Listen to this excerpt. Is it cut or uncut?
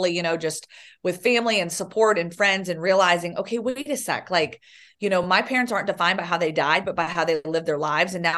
uncut